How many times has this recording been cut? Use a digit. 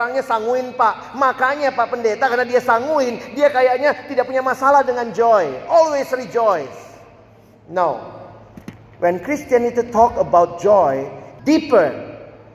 1